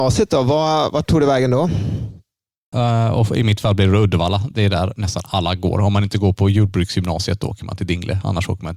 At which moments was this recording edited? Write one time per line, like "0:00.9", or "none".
0:02.7